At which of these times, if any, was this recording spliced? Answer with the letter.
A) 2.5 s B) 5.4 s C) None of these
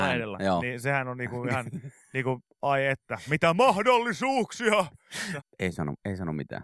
B